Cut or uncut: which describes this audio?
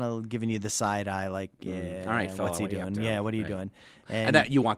uncut